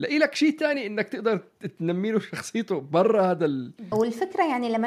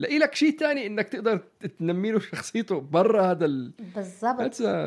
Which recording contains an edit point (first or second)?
first